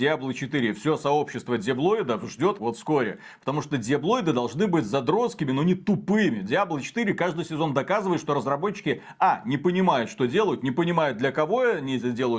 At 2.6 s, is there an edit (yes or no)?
yes